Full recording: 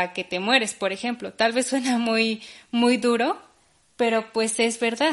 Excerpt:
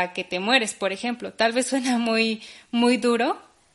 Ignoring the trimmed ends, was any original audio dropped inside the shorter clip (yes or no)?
no